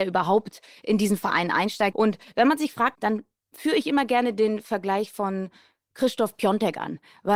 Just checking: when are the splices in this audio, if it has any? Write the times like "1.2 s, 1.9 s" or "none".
1.9 s, 2.9 s

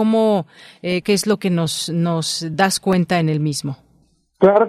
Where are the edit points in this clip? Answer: 1.0 s

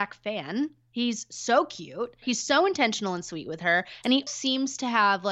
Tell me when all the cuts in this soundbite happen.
2.2 s, 4.3 s

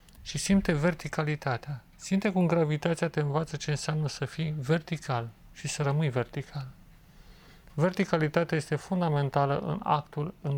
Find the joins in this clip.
none

